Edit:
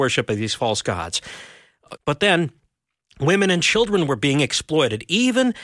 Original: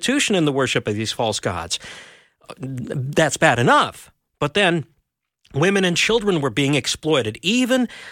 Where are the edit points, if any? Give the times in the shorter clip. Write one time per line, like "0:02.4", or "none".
0:02.0